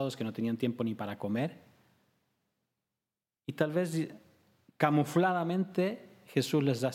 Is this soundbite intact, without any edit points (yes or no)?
yes